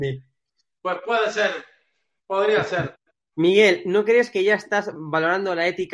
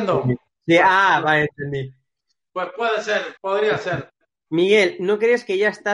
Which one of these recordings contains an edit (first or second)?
second